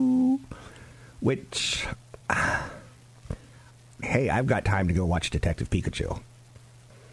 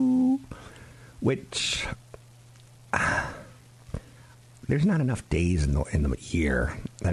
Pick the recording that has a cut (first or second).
first